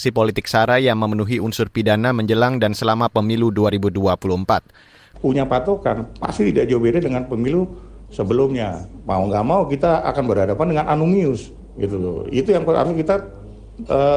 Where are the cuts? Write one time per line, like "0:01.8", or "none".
0:05.1